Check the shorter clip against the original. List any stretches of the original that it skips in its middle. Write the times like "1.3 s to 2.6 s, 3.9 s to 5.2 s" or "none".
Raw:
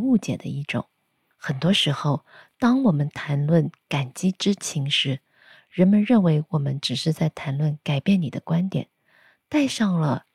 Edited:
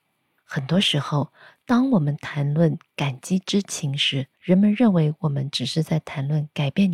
5.3 s to 5.6 s